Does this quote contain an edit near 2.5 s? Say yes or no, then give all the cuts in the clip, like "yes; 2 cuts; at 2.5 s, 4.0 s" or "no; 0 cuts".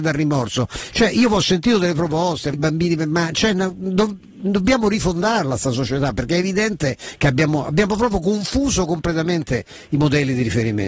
yes; 1 cut; at 2.5 s